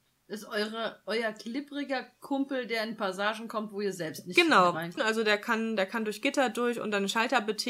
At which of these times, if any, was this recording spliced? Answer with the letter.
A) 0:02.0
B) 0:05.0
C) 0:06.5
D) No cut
B